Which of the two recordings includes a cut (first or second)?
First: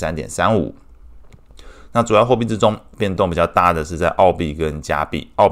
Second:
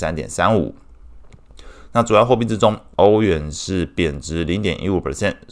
second